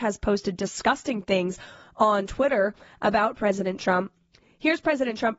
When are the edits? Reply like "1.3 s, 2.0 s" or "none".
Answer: none